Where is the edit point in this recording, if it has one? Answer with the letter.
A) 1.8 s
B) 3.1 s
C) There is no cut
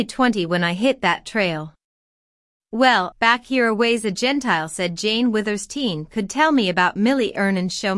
B